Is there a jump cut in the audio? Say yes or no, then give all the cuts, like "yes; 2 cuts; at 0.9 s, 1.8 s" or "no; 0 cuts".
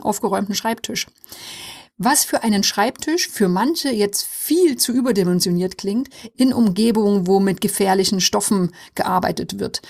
yes; 1 cut; at 6.3 s